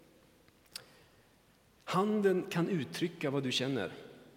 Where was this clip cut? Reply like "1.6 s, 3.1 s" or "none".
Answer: none